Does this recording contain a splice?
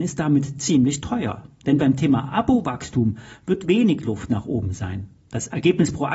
no; 0 cuts

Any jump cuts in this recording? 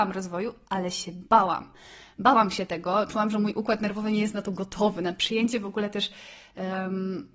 no; 0 cuts

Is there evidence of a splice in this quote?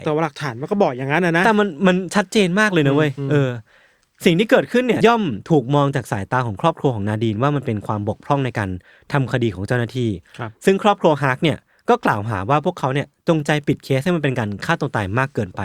yes; 1 cut; at 5.0 s

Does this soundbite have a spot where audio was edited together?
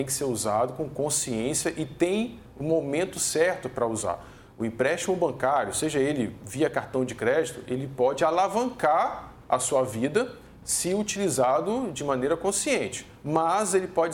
no; 0 cuts

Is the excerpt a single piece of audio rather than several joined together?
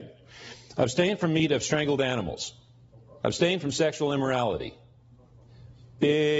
no; 1 cut; at 3.2 s

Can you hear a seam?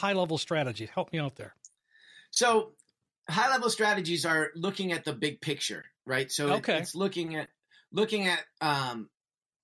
no; 0 cuts

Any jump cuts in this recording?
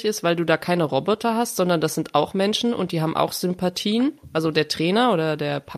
no; 0 cuts

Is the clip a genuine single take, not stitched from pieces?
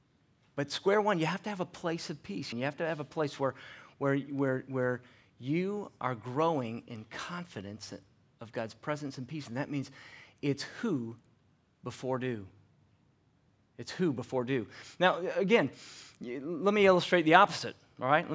no; 1 cut; at 2.5 s

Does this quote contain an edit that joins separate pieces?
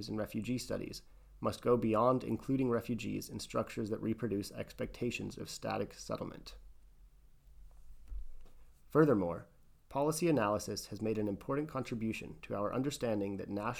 yes; 1 cut; at 8.8 s

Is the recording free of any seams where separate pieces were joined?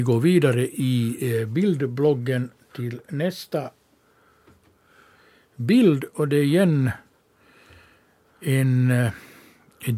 yes; 0 cuts

